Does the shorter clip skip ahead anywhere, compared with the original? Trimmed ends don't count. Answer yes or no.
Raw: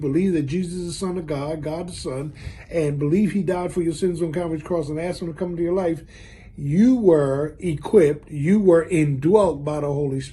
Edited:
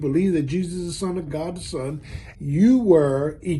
yes